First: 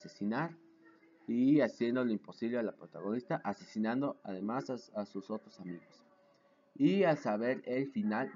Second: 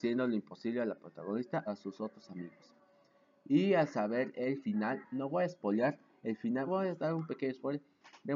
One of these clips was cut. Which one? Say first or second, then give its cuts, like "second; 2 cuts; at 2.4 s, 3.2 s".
second; 3 cuts; at 1.6 s, 5.0 s, 6.7 s